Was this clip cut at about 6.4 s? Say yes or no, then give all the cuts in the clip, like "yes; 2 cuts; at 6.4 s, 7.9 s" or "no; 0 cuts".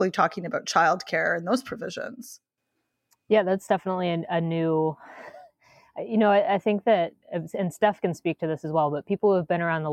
no; 0 cuts